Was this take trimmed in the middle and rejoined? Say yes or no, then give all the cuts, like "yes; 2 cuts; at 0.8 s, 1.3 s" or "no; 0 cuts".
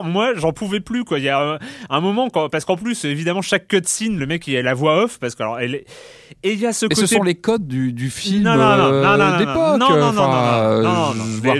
no; 0 cuts